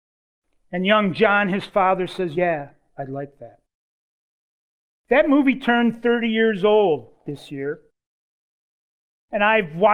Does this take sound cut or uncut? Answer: uncut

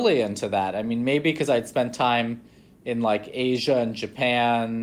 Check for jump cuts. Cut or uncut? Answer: uncut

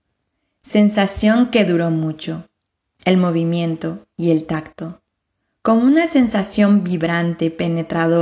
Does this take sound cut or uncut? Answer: cut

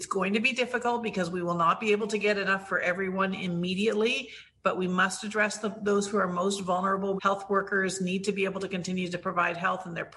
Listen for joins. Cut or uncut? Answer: cut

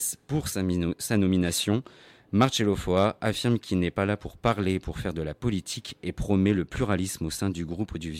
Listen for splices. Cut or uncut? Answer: uncut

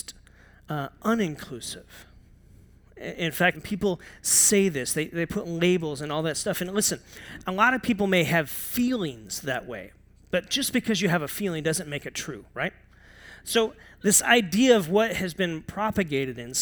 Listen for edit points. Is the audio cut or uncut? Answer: cut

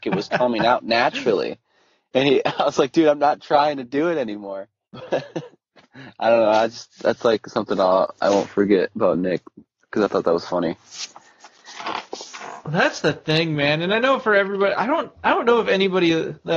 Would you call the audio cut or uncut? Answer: uncut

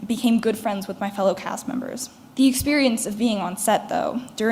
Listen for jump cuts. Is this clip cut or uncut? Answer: cut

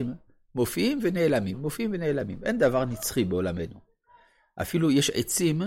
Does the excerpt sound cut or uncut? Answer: uncut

